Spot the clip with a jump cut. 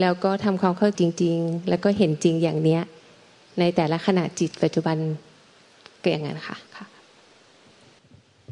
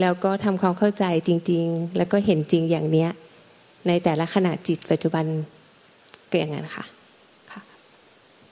first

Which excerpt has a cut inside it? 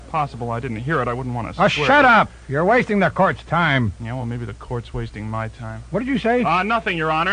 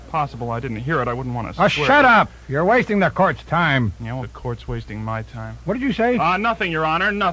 second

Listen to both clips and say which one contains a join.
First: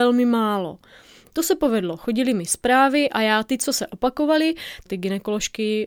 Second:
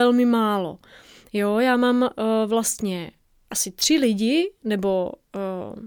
first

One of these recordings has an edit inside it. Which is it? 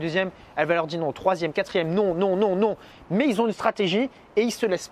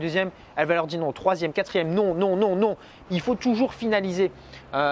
second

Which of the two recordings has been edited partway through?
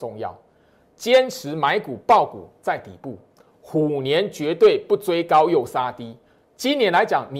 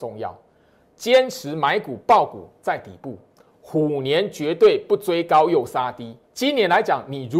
second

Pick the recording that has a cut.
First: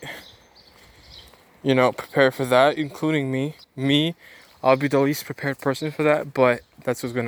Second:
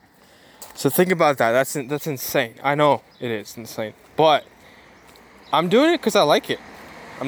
first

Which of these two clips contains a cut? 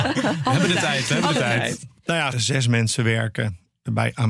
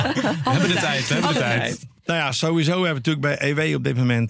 first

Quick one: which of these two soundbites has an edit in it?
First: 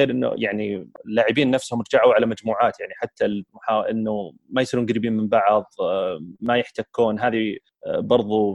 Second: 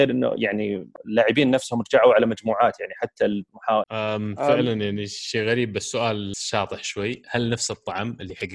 second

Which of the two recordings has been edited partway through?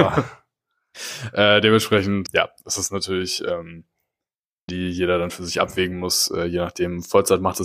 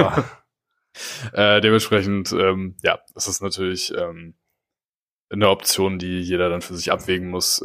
first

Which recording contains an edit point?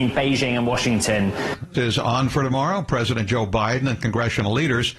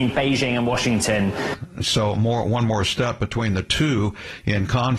first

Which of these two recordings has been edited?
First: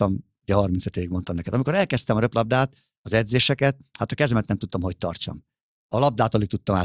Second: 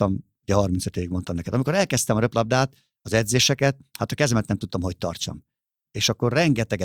second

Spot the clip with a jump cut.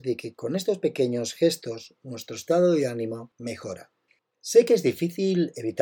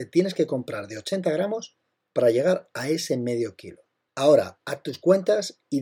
first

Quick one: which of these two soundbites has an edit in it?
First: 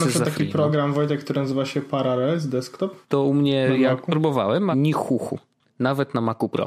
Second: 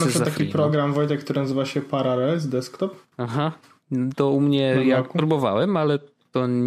first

